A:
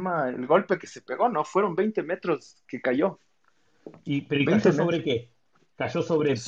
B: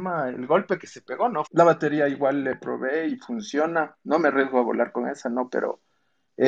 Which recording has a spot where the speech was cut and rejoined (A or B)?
B